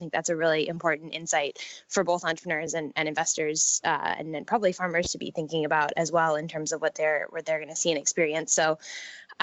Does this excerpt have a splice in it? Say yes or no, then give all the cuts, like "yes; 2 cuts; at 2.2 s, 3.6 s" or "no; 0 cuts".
no; 0 cuts